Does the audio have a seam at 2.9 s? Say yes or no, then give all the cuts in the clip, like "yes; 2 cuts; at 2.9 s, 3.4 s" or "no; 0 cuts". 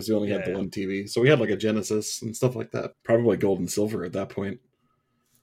yes; 1 cut; at 2.9 s